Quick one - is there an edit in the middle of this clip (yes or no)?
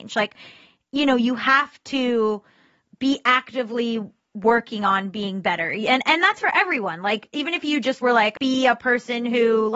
yes